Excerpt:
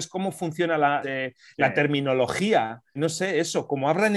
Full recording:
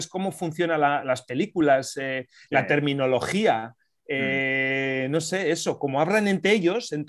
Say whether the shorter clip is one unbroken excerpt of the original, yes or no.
no